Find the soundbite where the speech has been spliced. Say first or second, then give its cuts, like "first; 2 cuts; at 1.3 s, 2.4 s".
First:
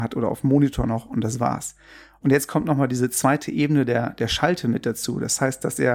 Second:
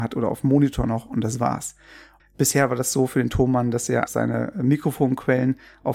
second; 2 cuts; at 2.2 s, 4.1 s